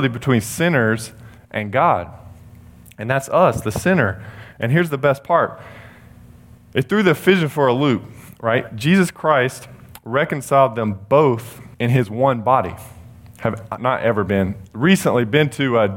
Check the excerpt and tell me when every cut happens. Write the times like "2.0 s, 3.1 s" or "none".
11.7 s, 13.8 s